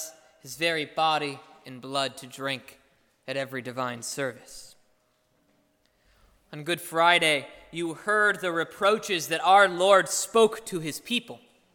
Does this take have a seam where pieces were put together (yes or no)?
no